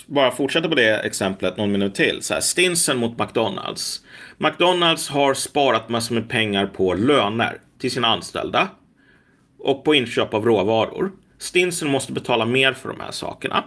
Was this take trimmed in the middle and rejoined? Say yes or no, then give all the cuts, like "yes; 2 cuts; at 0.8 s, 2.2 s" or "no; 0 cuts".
no; 0 cuts